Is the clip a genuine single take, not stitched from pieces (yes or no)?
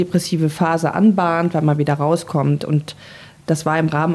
yes